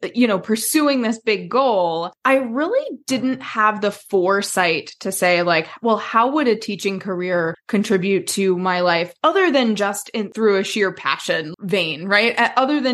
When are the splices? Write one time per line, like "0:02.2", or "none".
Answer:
0:11.5